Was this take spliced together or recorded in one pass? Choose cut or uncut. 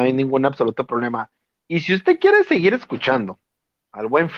uncut